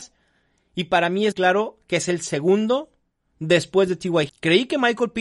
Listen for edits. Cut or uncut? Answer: cut